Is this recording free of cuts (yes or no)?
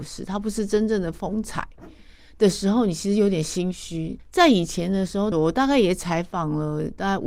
no